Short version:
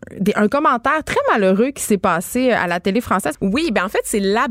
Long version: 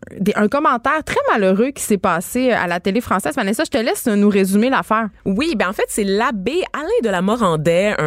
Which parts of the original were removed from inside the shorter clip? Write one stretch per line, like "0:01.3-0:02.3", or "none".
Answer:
0:03.3-0:05.2